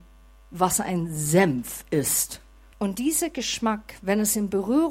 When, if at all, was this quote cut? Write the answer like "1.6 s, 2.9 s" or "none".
2.7 s